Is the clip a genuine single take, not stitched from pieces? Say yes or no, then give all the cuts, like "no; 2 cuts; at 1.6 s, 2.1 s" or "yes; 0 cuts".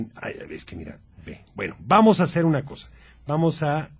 yes; 0 cuts